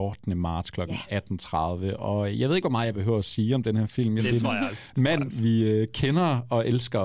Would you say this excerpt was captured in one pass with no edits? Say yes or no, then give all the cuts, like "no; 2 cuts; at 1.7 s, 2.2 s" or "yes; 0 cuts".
no; 1 cut; at 4.2 s